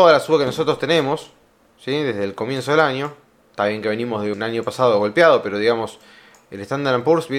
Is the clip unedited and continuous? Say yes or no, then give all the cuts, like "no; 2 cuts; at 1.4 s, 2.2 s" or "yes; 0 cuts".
no; 1 cut; at 4.3 s